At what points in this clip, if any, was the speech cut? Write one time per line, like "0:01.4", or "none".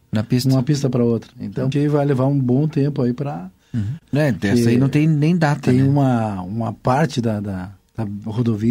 0:01.7
0:04.0